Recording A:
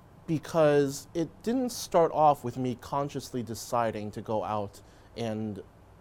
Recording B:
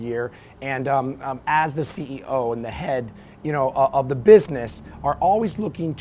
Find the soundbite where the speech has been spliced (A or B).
B